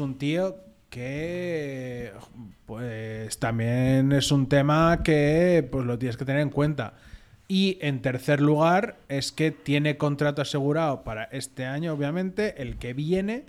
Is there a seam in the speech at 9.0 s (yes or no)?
no